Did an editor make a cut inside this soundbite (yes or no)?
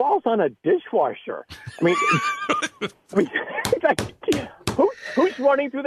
no